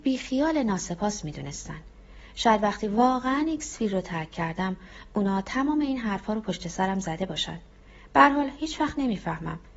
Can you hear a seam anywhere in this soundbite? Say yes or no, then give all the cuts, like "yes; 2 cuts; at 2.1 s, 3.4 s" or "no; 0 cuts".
no; 0 cuts